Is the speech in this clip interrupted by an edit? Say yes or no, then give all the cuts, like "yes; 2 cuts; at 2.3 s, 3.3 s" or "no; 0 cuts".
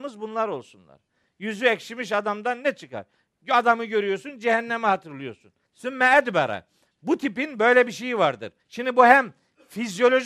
yes; 2 cuts; at 5.7 s, 8.6 s